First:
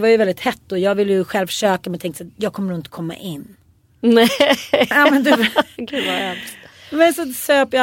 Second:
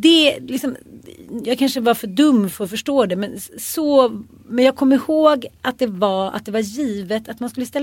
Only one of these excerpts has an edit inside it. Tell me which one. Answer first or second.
first